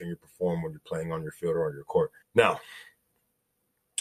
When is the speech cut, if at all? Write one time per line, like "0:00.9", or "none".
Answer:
0:02.2